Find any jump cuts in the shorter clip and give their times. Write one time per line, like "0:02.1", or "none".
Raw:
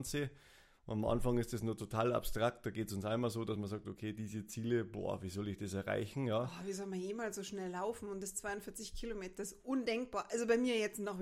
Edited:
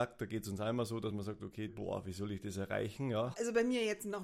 0:01.7
0:03.3